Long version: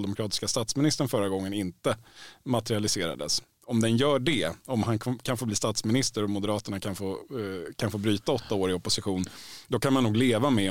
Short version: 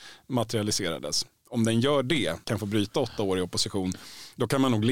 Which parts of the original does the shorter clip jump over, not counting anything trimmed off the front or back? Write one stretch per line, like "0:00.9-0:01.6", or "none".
0:04.6-0:07.8